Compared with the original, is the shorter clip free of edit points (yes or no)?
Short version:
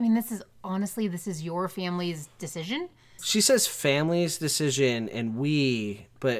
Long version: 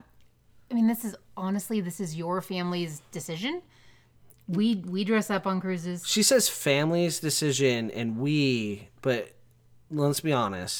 no